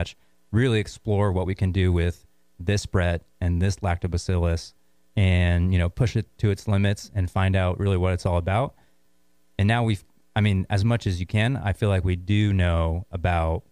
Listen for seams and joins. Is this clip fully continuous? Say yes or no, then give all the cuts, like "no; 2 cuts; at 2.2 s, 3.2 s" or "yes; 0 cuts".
yes; 0 cuts